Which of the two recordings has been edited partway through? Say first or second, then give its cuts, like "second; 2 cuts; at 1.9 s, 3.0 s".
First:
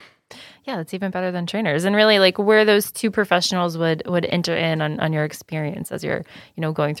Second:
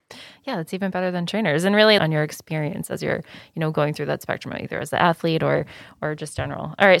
second; 1 cut; at 2.0 s